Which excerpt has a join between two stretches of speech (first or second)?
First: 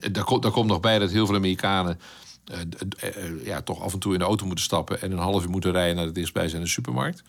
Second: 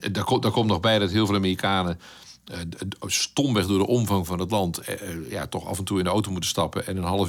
first